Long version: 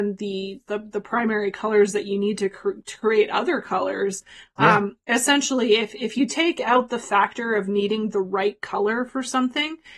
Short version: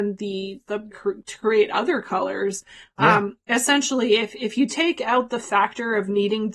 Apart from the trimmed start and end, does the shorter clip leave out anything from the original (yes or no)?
yes